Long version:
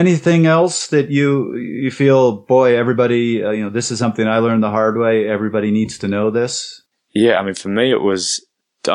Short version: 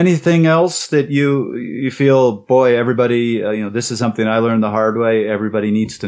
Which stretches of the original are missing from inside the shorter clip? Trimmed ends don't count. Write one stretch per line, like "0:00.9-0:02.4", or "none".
none